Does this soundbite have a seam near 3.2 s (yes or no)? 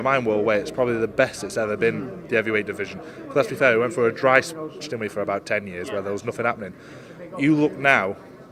no